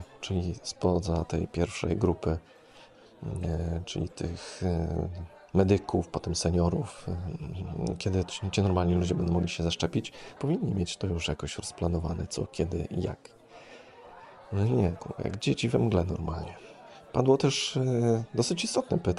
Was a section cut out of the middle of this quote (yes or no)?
yes